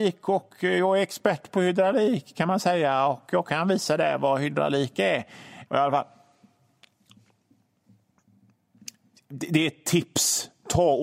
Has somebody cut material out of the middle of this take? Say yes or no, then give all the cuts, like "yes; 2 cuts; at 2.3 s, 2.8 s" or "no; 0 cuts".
yes; 1 cut; at 5.7 s